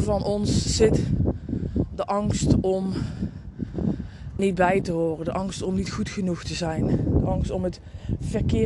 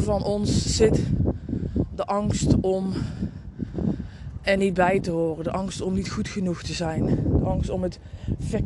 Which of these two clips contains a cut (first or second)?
first